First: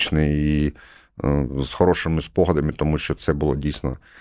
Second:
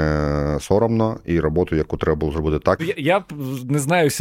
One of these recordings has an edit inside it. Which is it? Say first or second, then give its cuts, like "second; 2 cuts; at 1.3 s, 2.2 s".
second; 1 cut; at 2.8 s